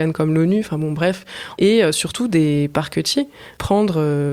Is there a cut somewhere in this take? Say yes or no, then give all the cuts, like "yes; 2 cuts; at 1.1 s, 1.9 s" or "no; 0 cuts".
yes; 1 cut; at 1.6 s